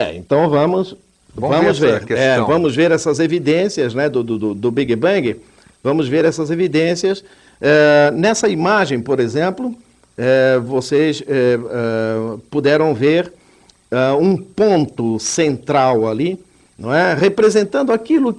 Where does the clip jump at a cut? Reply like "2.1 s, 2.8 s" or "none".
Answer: none